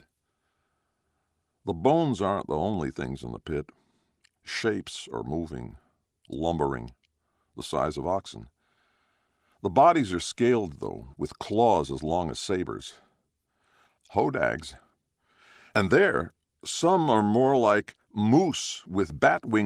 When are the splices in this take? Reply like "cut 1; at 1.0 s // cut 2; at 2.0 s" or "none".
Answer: cut 1; at 11.1 s